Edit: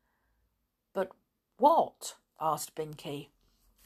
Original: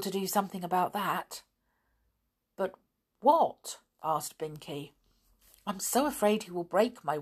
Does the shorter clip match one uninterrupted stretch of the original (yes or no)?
yes